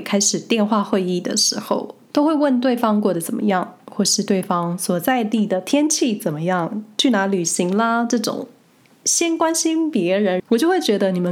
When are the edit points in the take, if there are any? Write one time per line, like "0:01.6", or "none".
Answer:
0:10.4